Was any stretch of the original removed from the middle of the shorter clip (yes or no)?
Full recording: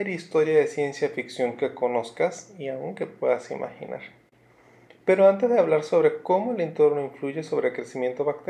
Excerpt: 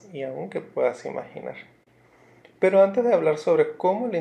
no